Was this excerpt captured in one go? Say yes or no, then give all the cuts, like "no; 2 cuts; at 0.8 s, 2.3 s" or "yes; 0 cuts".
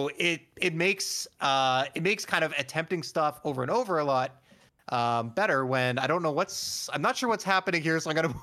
yes; 0 cuts